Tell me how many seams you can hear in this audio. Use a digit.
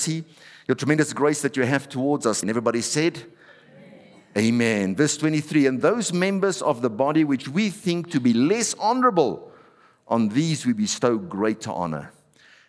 1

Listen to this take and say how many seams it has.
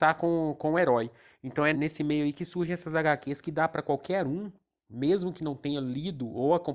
1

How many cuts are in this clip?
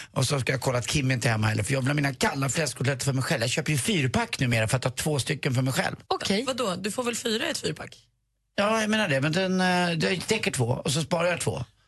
1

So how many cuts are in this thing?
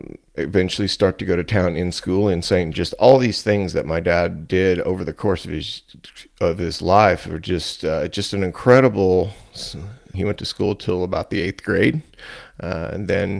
2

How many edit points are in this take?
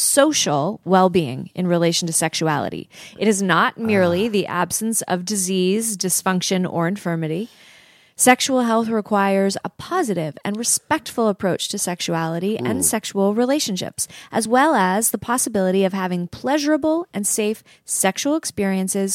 0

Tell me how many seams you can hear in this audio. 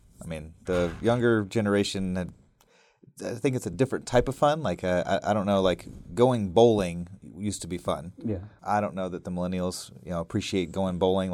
0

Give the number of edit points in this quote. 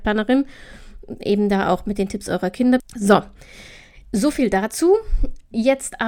1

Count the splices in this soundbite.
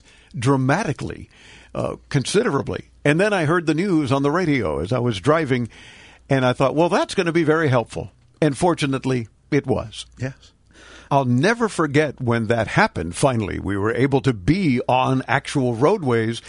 1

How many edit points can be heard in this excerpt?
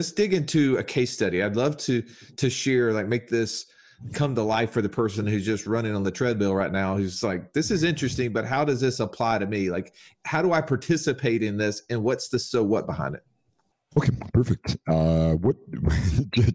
0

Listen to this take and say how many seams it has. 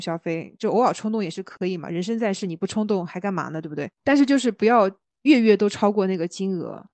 1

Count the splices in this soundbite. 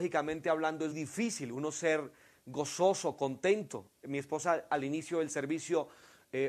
1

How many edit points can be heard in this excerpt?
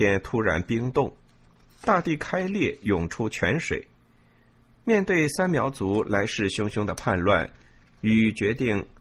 1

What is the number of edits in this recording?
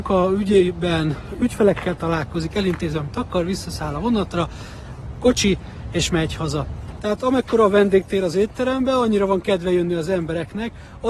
1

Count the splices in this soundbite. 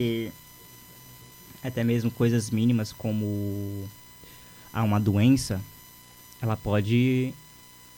0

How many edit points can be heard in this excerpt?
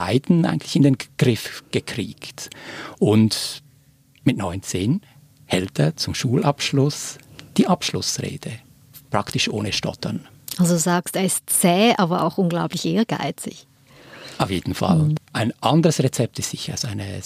1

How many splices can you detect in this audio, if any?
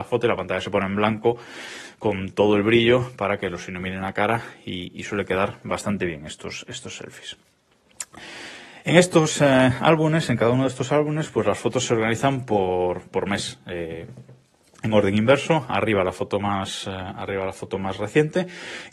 0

